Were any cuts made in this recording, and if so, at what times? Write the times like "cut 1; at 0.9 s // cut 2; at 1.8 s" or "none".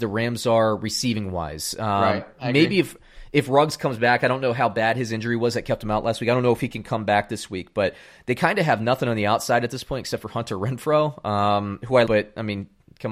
cut 1; at 12.1 s